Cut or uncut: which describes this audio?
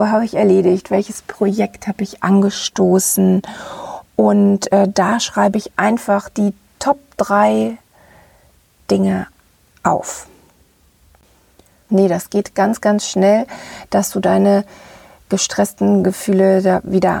cut